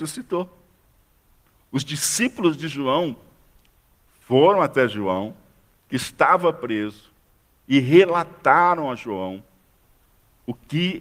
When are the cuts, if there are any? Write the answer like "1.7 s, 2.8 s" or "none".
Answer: none

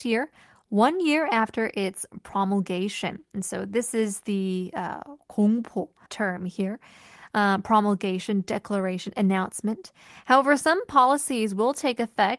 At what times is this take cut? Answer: 6.1 s

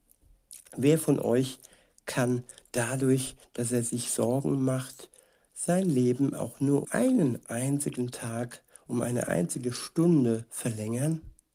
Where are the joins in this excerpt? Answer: 6.8 s

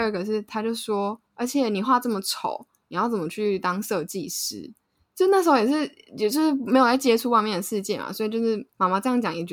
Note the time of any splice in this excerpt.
1.8 s

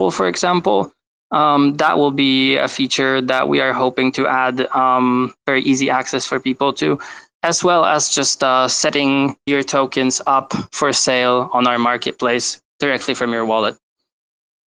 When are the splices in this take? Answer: 7.4 s, 9.5 s

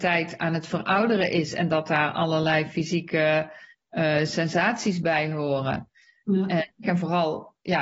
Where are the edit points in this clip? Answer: 6.8 s

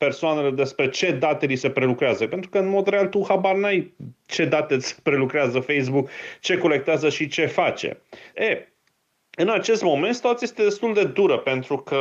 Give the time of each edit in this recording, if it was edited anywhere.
8.3 s

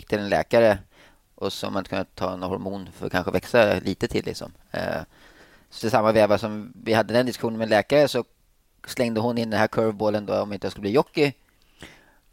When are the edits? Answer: 5.8 s

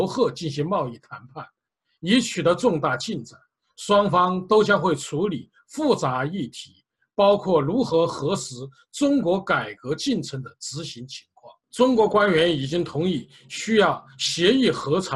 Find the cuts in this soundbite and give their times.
11.6 s

